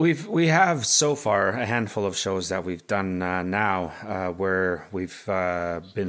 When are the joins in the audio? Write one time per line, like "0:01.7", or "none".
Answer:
none